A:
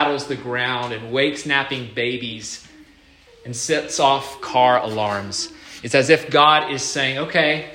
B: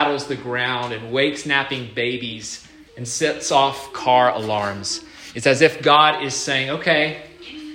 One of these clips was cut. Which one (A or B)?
B